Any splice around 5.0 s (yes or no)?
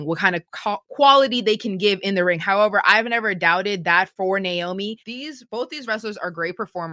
yes